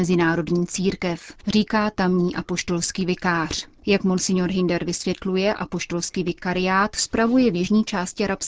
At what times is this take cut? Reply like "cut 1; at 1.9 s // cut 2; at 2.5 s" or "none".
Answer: cut 1; at 3.8 s

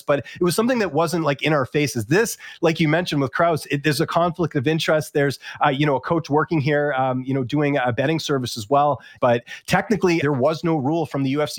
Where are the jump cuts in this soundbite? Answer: cut 1; at 9.2 s // cut 2; at 10.2 s

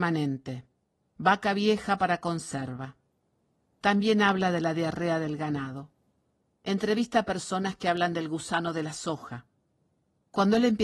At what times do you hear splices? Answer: none

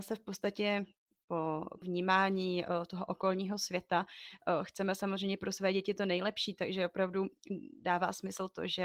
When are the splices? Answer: cut 1; at 1.8 s

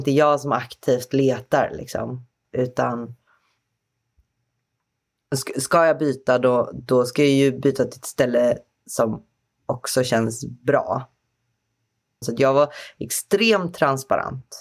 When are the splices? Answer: cut 1; at 2.4 s // cut 2; at 12.2 s

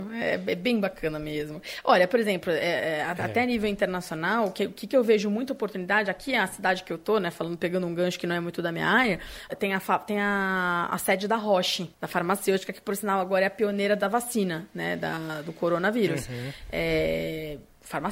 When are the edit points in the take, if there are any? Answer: cut 1; at 9.5 s // cut 2; at 11.9 s

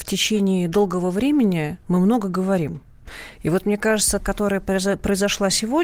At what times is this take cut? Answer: cut 1; at 4.2 s

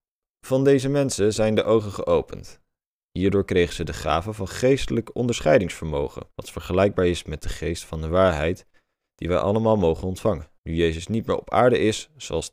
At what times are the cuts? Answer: cut 1; at 3.0 s // cut 2; at 6.3 s // cut 3; at 10.6 s

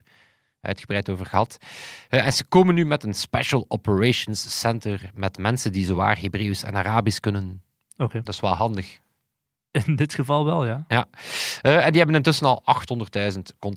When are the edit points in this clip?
none

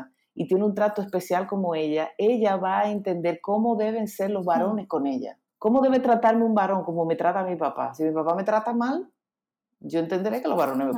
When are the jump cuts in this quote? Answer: cut 1; at 5.5 s

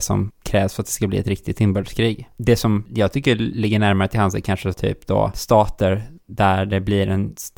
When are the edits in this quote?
none

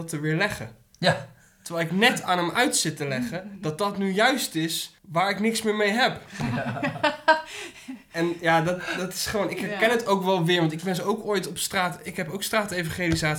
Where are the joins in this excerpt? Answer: cut 1; at 5.0 s

